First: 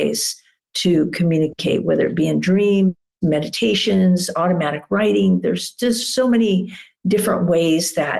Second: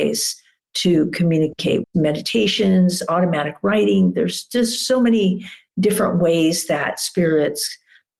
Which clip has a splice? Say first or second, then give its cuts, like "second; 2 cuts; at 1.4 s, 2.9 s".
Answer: second; 1 cut; at 1.8 s